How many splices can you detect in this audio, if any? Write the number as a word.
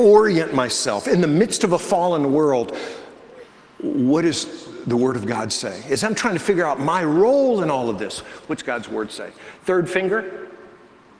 zero